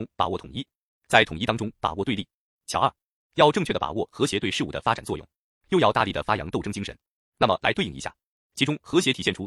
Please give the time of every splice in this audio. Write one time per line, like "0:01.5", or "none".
none